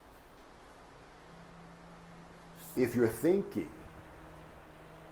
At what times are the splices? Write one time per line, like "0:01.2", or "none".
0:02.7